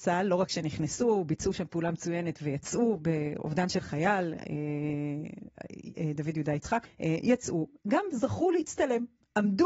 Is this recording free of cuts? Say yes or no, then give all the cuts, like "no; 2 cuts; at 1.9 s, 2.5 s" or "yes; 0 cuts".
no; 1 cut; at 6.8 s